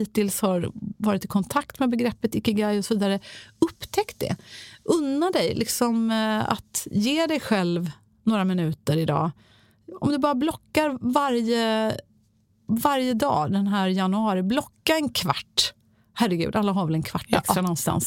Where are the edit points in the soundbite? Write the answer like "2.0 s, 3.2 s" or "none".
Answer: none